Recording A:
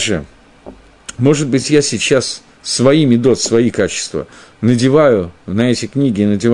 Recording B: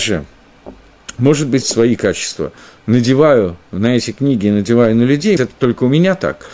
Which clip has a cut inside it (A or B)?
B